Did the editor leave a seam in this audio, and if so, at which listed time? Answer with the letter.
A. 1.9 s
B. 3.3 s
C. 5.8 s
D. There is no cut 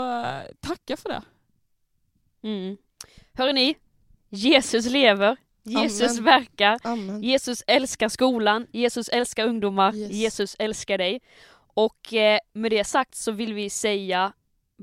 D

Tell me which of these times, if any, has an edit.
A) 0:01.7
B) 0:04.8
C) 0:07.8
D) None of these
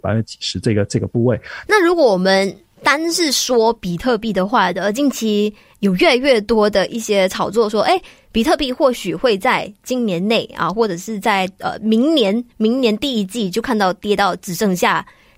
A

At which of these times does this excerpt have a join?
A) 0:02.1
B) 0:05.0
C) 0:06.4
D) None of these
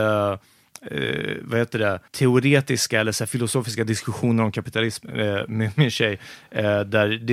A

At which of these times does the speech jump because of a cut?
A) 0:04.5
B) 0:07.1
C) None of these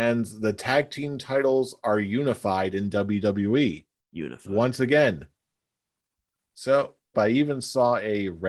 B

